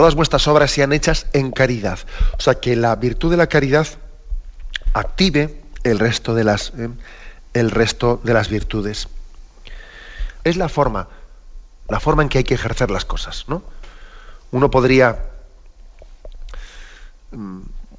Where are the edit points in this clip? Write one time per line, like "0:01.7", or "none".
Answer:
0:10.4